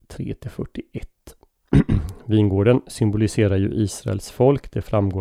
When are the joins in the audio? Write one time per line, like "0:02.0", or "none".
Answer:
none